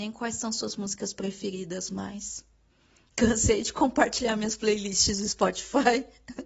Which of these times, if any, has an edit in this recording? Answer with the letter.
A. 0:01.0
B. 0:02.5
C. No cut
C